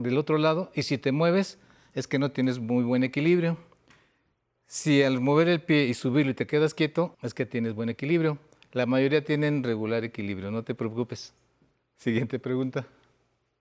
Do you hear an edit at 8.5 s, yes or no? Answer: no